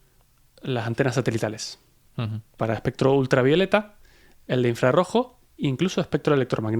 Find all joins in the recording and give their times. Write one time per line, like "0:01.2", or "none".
0:02.6
0:04.4